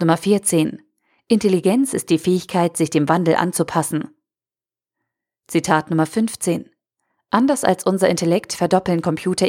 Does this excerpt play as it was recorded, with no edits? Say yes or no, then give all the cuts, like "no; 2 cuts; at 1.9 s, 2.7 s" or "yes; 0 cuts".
yes; 0 cuts